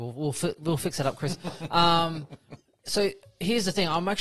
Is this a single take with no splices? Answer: yes; 0 cuts

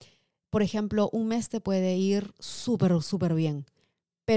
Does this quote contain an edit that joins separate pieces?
no; 0 cuts

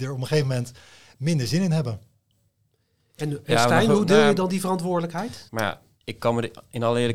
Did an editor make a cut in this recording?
yes; 1 cut; at 5.5 s

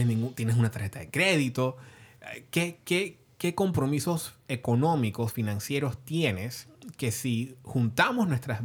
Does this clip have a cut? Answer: no; 0 cuts

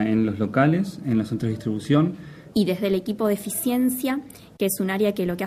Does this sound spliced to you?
yes; 1 cut; at 2.5 s

